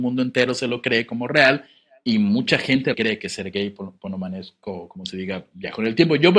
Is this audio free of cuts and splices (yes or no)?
no